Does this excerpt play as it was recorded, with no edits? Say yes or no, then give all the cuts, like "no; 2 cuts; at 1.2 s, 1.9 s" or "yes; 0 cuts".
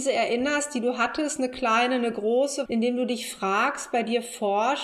no; 1 cut; at 2.7 s